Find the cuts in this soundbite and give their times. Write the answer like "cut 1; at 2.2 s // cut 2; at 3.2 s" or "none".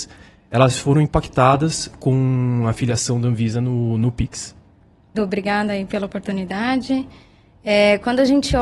cut 1; at 5.1 s

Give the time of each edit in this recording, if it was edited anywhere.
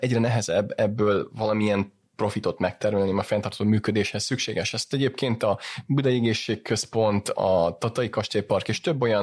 none

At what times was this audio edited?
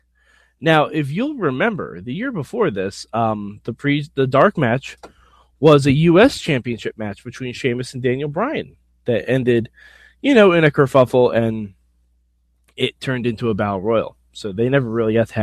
none

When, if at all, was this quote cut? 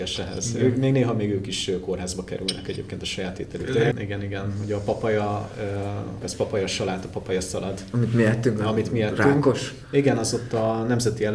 cut 1; at 3.9 s // cut 2; at 6.2 s

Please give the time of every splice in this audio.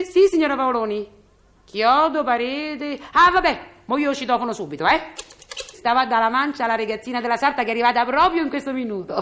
cut 1; at 5.7 s

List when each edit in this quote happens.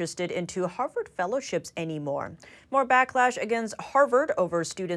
cut 1; at 2.6 s

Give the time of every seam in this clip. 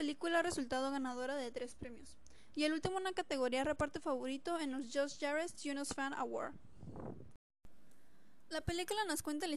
cut 1; at 2.5 s

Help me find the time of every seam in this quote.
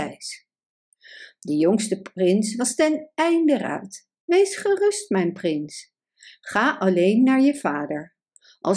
cut 1; at 4.2 s

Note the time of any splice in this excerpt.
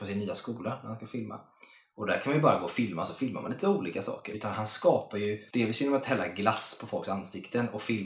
cut 1; at 4.3 s // cut 2; at 5.5 s

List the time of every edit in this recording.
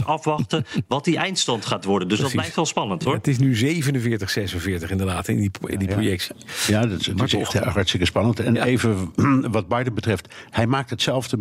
none

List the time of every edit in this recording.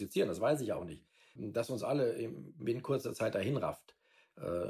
cut 1; at 1.4 s

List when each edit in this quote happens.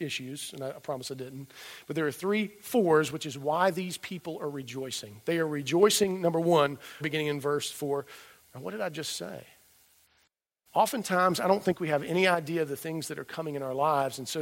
cut 1; at 7.0 s // cut 2; at 8.4 s

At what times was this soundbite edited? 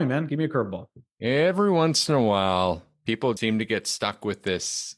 cut 1; at 3.4 s

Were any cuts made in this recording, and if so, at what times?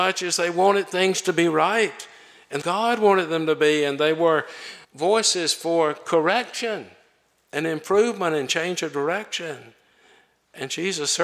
cut 1; at 2.6 s // cut 2; at 4.8 s

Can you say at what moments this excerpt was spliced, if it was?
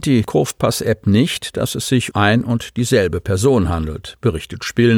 cut 1; at 2.1 s

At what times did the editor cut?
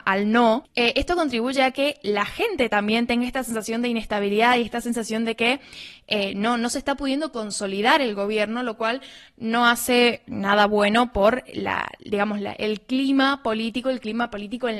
none

